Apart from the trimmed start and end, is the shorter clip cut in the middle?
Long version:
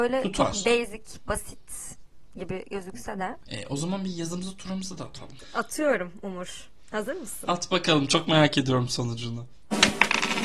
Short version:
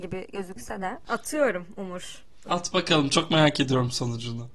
yes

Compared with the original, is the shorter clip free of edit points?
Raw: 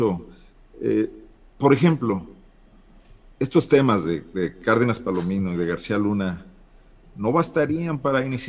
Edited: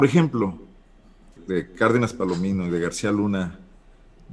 no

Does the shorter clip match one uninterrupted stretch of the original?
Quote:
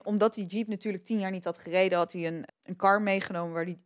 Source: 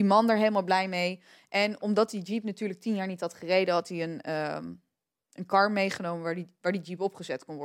no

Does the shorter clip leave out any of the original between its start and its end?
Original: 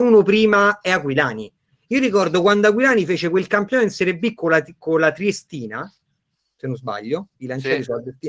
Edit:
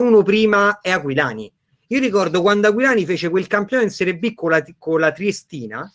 no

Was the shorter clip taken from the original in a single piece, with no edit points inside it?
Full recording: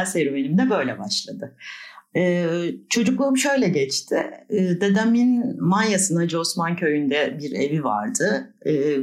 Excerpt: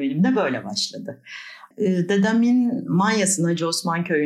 no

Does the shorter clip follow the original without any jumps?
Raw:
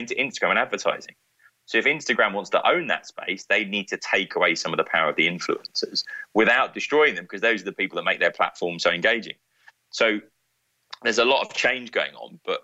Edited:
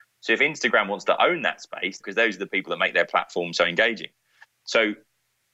no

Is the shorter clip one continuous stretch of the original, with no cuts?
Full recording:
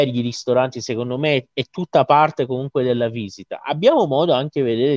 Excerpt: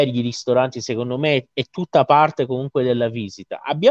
yes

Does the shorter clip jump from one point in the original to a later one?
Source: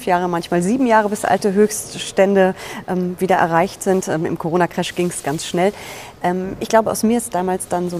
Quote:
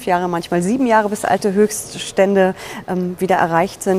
no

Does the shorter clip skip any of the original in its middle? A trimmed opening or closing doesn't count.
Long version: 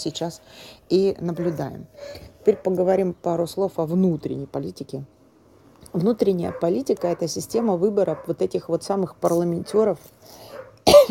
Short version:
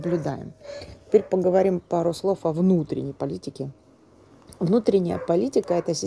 no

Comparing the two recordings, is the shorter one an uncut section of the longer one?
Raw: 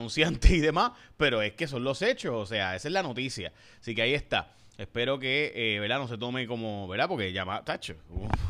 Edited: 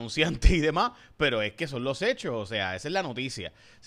yes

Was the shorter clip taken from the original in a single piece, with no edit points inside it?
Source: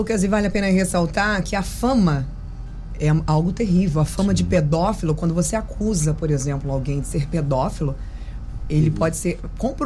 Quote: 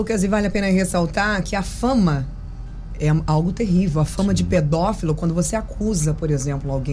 yes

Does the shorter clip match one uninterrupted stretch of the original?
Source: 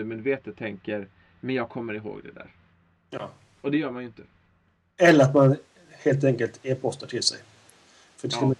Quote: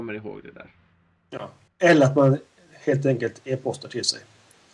no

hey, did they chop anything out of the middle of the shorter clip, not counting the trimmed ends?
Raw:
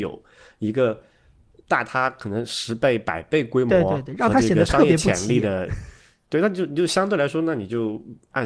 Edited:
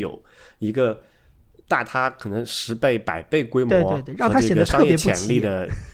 no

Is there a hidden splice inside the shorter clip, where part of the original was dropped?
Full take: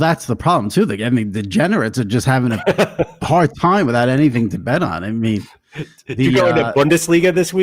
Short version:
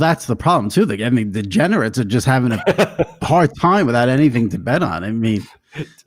no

